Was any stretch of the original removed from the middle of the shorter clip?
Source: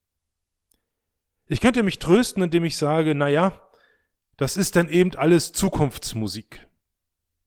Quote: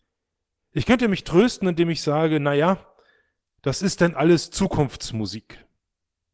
yes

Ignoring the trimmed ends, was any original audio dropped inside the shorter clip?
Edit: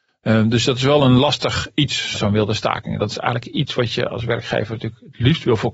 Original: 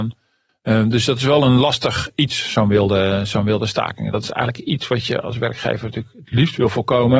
yes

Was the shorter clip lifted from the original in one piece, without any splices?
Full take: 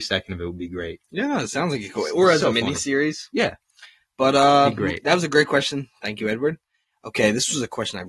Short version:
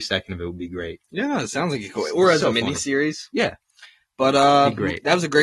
yes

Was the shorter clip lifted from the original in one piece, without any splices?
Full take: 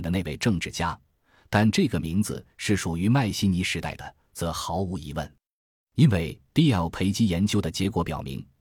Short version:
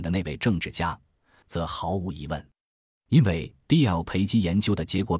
no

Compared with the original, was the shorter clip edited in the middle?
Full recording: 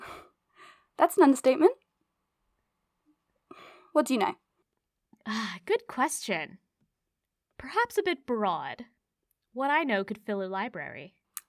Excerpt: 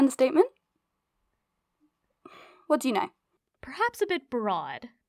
yes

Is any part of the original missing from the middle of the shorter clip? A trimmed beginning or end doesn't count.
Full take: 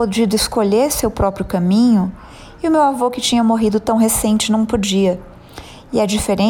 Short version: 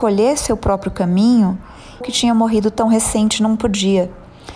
yes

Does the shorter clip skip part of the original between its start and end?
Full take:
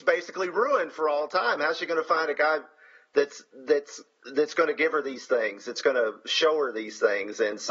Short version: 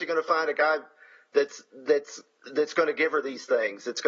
no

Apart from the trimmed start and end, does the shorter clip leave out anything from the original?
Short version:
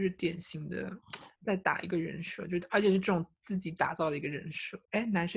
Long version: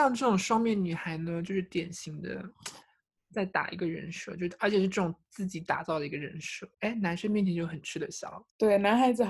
yes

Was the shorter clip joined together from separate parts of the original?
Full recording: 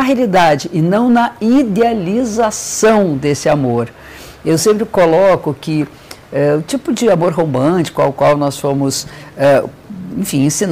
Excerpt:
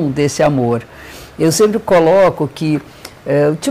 no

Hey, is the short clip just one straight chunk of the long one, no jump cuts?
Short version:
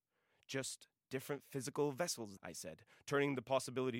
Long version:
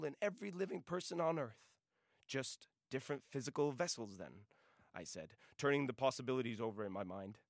no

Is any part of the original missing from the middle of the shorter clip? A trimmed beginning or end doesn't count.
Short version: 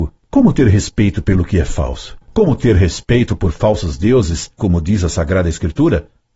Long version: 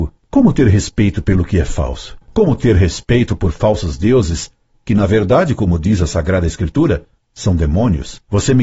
yes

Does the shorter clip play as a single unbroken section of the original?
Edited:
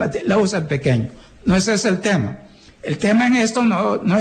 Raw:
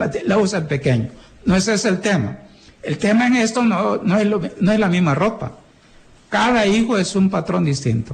yes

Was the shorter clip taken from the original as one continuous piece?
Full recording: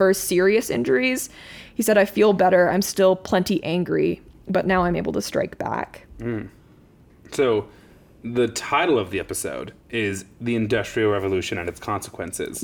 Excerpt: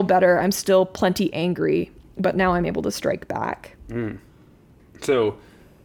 yes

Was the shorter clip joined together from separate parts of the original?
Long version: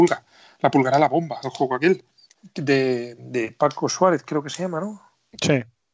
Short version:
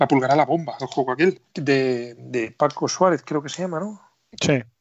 yes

